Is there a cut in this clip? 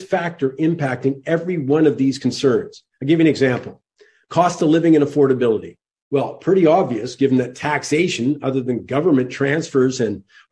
no; 0 cuts

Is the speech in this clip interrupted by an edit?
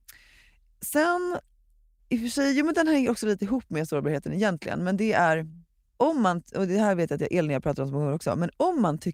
no; 0 cuts

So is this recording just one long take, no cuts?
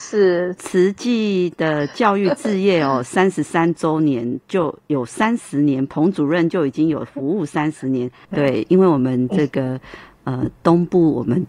no; 1 cut; at 8.2 s

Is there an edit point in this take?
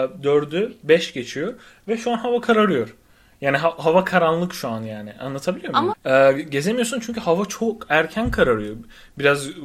yes; 1 cut; at 5.9 s

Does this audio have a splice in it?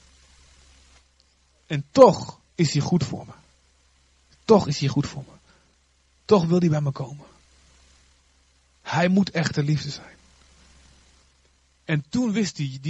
no; 0 cuts

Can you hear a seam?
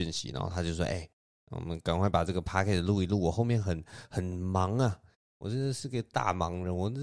no; 0 cuts

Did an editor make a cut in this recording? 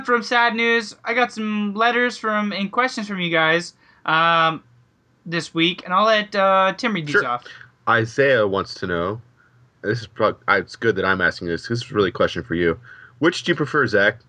no; 0 cuts

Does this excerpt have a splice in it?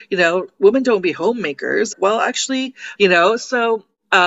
yes; 2 cuts; at 1.9 s, 3.0 s

